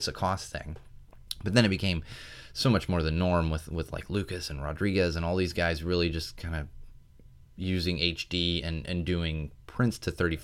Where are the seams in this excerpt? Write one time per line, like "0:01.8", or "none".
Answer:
none